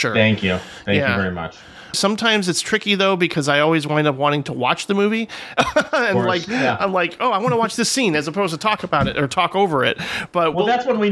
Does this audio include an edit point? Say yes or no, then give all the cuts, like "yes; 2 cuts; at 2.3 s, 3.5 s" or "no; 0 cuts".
yes; 1 cut; at 1.9 s